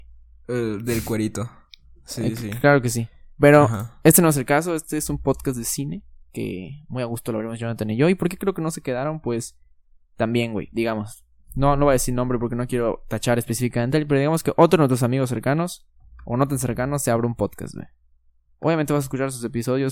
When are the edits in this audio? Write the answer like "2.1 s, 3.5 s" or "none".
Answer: none